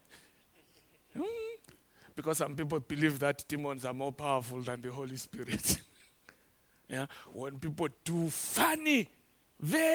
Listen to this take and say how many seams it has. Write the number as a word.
zero